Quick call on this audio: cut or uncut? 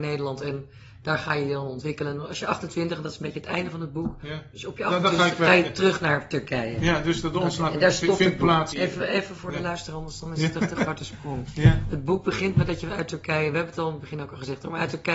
cut